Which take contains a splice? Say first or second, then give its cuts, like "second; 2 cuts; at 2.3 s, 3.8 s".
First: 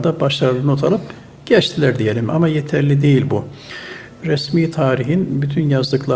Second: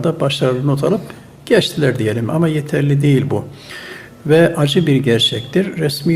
first; 1 cut; at 4.2 s